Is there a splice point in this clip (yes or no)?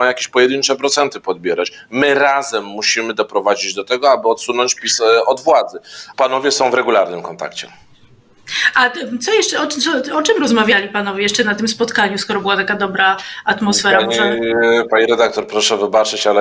yes